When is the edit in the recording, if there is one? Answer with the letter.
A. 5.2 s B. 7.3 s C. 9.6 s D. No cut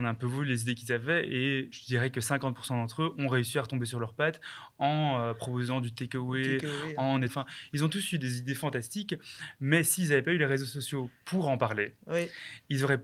B